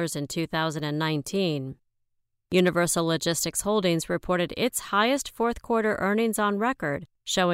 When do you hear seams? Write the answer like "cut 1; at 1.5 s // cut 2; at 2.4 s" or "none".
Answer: cut 1; at 2.5 s